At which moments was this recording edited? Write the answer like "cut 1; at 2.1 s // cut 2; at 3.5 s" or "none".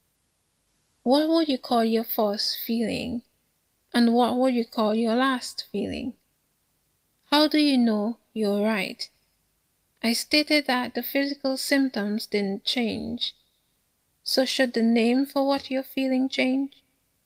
none